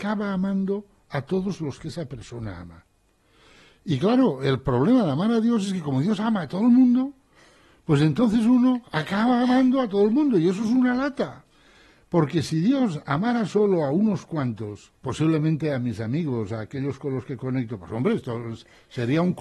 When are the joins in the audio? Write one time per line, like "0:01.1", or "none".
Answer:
0:15.0